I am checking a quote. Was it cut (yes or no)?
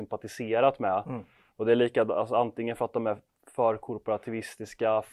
no